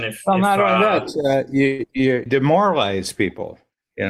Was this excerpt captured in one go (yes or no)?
no